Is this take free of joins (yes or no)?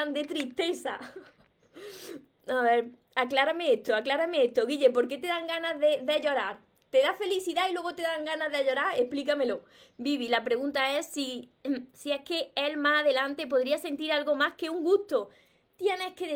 yes